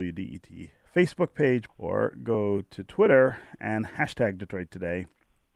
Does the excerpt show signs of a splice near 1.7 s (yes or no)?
yes